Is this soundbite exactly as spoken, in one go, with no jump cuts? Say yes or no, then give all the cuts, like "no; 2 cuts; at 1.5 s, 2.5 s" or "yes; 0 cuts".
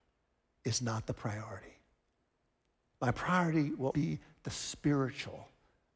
no; 1 cut; at 3.9 s